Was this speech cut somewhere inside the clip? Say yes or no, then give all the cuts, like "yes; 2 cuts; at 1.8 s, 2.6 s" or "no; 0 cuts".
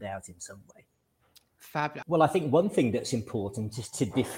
yes; 1 cut; at 2.0 s